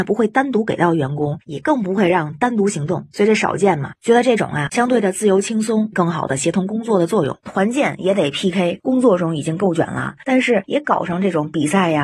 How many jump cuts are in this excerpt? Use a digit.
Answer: 3